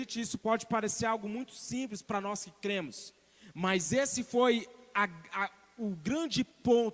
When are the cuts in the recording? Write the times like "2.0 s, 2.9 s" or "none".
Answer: none